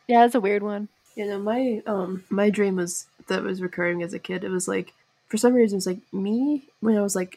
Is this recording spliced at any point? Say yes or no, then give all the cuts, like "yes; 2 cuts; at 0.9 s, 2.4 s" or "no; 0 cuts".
no; 0 cuts